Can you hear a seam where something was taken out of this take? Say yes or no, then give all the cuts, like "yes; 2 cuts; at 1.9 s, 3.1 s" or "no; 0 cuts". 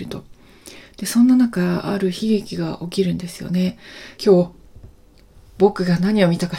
yes; 1 cut; at 4.2 s